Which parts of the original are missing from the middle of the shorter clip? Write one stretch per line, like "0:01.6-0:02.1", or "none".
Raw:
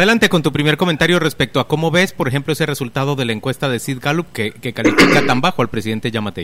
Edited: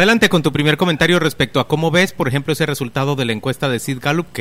none